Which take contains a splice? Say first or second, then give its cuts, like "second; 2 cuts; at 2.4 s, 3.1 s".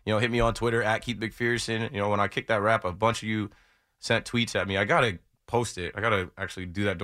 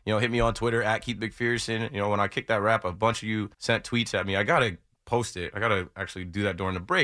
second; 1 cut; at 3.5 s